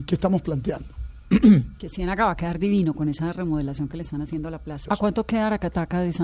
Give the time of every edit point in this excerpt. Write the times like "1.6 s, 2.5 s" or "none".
1.8 s, 4.8 s